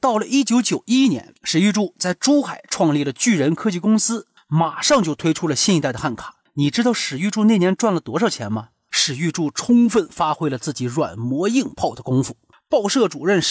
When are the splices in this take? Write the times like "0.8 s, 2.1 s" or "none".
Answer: 8.9 s